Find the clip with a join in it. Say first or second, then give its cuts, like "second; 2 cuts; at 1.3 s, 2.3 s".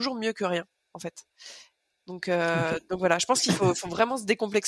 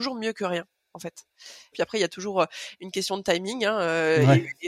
second; 1 cut; at 1.7 s